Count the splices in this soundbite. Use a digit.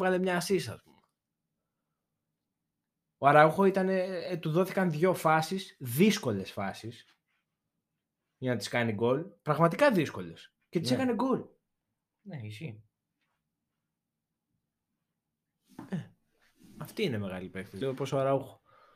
1